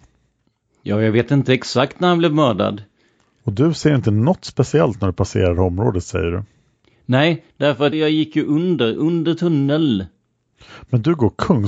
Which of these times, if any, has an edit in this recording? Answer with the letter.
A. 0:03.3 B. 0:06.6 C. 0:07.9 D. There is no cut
C